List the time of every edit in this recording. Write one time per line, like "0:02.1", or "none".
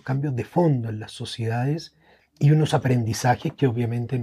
none